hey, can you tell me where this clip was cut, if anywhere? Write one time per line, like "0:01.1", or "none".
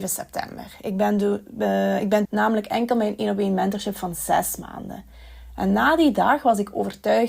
0:02.3

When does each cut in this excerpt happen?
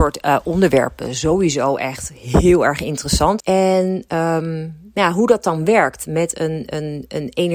0:03.4

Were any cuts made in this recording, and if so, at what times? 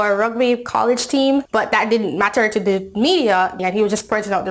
0:01.5
0:03.6

